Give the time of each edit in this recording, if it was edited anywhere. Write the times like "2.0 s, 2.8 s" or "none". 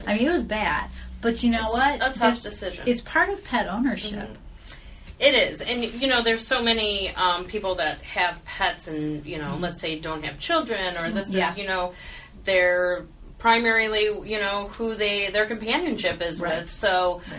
none